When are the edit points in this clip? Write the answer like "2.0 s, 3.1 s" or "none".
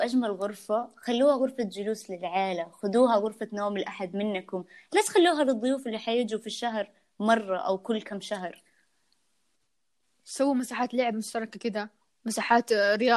none